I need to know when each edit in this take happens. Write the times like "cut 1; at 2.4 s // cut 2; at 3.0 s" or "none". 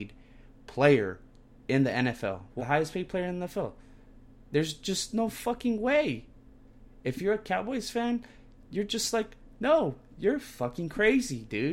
cut 1; at 2.6 s